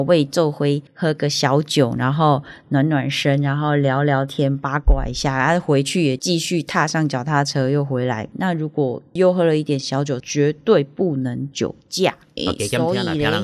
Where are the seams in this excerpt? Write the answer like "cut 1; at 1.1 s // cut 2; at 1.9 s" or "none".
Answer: cut 1; at 8.3 s // cut 2; at 10.2 s // cut 3; at 12.4 s